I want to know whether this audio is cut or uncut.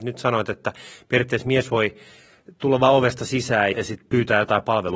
cut